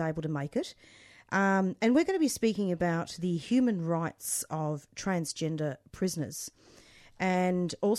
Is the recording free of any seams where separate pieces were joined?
yes; 0 cuts

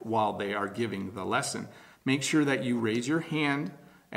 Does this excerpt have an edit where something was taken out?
yes; 1 cut; at 1.9 s

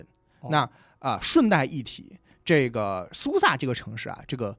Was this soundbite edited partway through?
no; 0 cuts

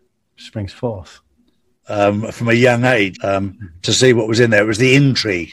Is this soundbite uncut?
no; 2 cuts; at 1.7 s, 3.1 s

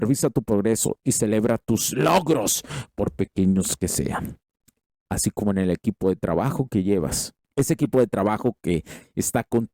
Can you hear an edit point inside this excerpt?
no; 0 cuts

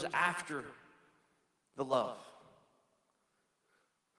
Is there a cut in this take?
no; 0 cuts

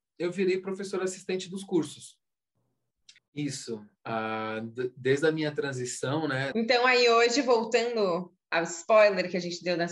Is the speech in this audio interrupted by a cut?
yes; 3 cuts; at 3.2 s, 6.5 s, 8.4 s

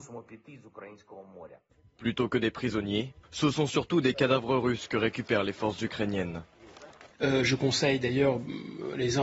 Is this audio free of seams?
no; 2 cuts; at 3.2 s, 7.1 s

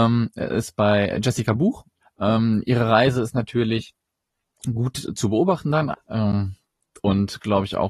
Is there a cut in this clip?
yes; 2 cuts; at 2.0 s, 5.9 s

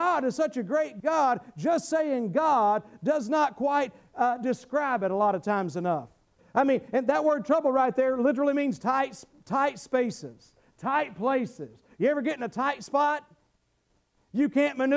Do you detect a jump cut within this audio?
yes; 1 cut; at 6.4 s

